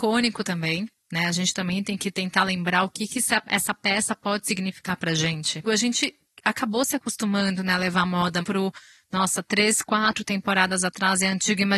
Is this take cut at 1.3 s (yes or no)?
no